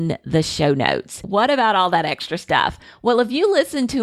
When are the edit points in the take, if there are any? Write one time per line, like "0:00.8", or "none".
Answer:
none